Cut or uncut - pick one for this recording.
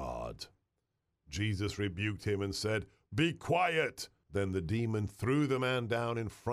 cut